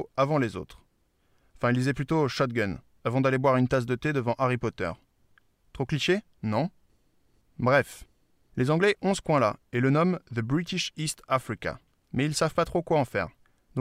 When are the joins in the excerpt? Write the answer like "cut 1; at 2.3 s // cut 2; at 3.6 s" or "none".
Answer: none